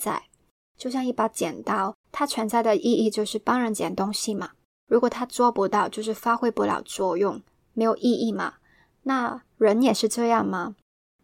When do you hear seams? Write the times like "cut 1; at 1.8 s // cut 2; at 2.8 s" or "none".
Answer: cut 1; at 2.0 s